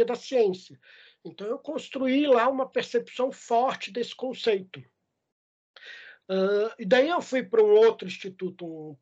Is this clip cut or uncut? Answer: uncut